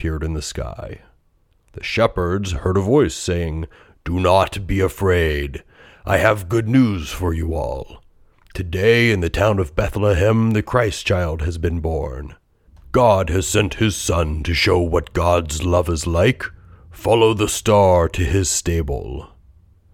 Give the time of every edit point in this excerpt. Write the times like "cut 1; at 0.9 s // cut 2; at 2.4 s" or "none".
none